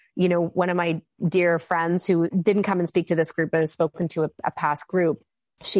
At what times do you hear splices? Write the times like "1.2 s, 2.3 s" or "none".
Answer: none